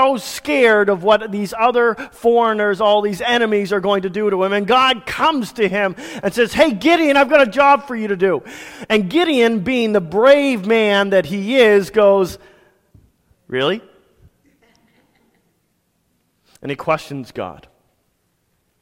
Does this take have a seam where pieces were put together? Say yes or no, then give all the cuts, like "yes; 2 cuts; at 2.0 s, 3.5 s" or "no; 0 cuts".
no; 0 cuts